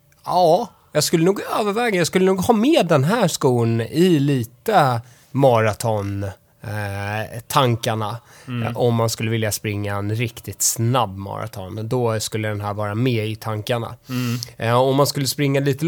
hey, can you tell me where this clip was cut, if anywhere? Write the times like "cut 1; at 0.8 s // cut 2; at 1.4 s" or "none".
none